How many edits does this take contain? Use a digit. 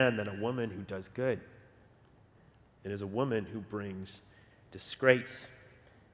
0